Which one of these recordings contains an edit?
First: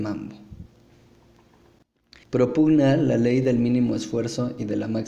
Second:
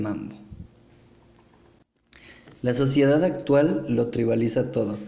first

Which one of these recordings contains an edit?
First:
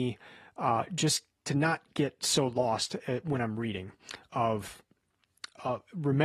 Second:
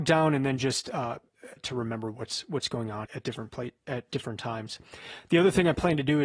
second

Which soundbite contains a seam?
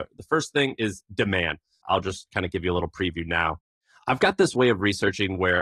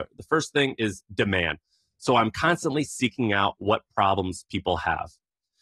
first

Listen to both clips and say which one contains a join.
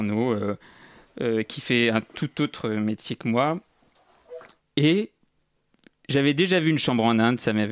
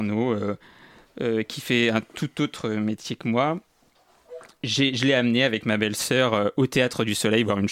first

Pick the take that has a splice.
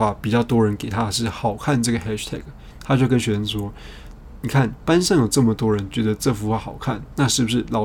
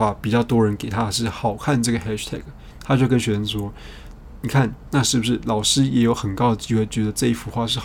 second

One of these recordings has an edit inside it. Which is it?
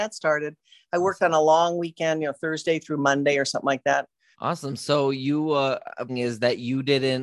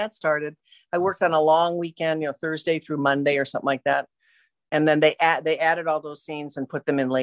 first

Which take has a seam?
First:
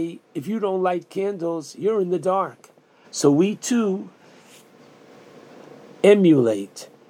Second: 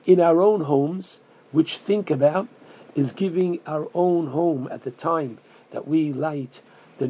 first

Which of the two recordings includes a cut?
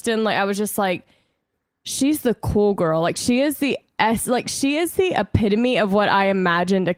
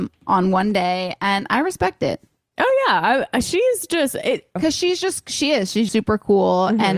second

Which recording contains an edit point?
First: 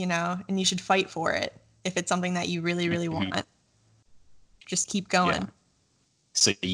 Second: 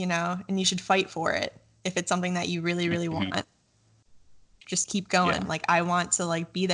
second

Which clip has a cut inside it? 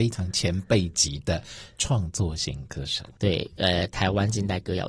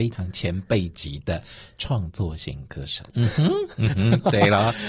second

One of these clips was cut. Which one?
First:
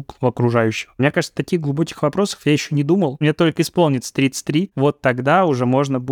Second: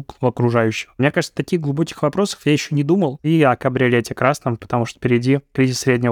second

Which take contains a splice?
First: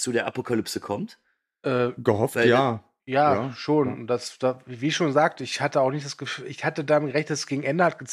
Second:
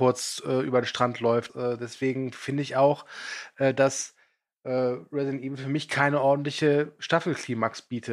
second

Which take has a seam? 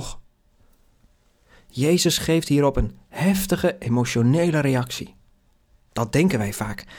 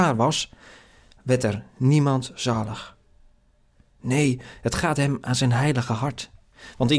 first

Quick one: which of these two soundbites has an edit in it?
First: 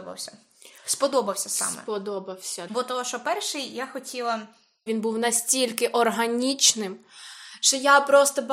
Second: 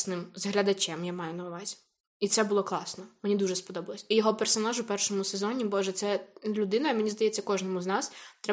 first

